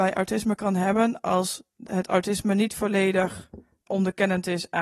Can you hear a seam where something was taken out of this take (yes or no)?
yes